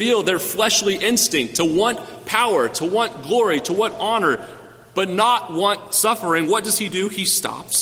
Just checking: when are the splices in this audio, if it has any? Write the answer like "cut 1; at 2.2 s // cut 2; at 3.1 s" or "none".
none